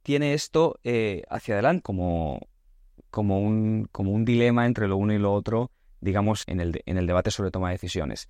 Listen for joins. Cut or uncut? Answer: cut